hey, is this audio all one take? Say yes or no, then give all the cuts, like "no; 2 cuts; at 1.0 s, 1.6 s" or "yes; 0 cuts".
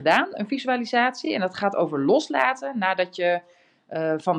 yes; 0 cuts